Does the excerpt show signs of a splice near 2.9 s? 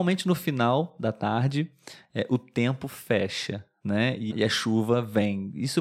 no; 1 cut; at 4.3 s

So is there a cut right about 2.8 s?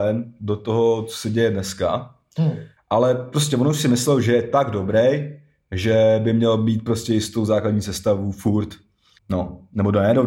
yes; 2 cuts; at 2.8 s, 9.2 s

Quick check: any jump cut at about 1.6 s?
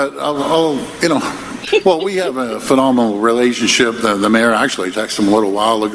yes; 2 cuts; at 1.6 s, 4.9 s

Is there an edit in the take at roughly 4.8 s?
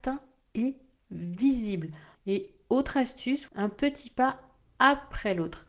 no; 2 cuts; at 2.1 s, 3.5 s

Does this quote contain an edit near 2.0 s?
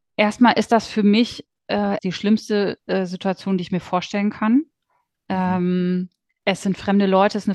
yes; 1 cut; at 2.0 s

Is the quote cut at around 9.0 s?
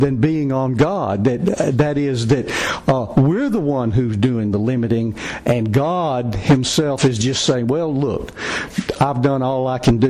yes; 1 cut; at 9.0 s

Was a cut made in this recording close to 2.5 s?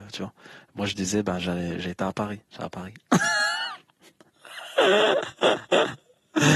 yes; 1 cut; at 2.5 s

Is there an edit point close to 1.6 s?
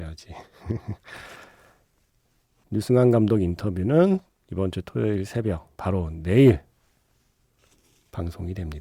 no; 1 cut; at 5.8 s

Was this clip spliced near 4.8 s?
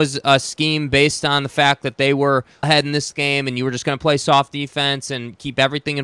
no; 1 cut; at 2.6 s

